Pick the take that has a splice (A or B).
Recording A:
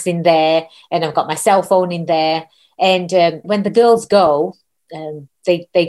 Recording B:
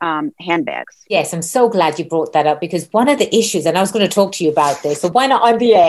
A